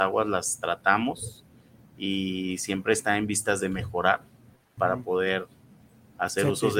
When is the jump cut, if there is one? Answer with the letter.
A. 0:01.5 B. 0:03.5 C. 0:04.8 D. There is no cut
C